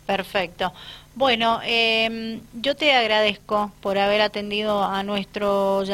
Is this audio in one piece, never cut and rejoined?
yes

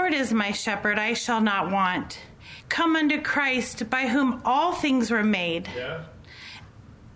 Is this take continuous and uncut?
no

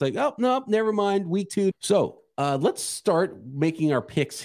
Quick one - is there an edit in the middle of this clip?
yes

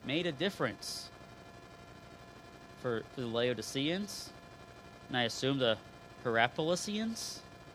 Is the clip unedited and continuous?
no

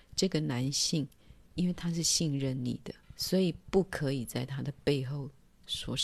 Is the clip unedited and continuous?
no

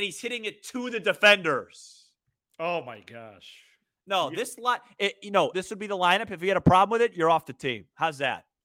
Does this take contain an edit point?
yes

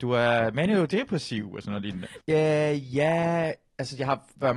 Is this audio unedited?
no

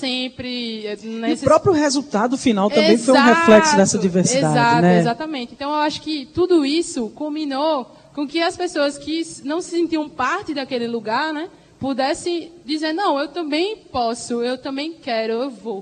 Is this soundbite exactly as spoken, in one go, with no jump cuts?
yes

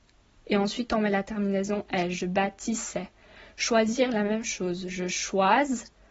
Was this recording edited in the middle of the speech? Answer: no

